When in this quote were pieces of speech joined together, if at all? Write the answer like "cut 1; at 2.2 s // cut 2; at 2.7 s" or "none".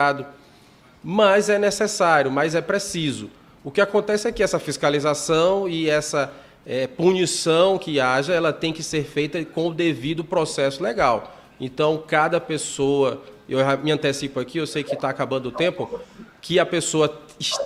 none